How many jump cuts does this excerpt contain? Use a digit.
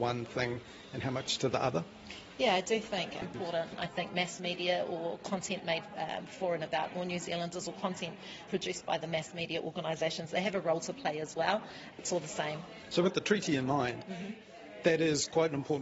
3